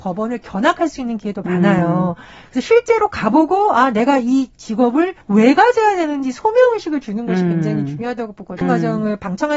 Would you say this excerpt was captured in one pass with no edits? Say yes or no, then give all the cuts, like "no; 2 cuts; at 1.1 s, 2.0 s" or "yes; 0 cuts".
no; 2 cuts; at 5.2 s, 8.6 s